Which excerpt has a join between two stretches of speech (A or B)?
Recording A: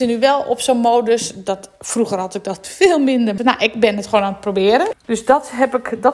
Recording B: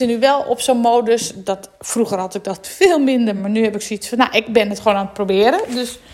A